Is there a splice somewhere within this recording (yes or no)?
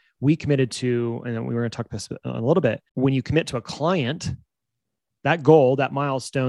yes